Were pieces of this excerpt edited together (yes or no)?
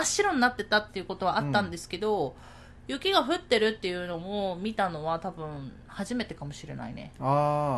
no